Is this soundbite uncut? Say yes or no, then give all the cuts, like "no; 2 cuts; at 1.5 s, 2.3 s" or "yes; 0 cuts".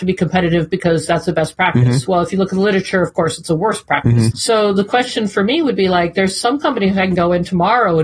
no; 1 cut; at 4.3 s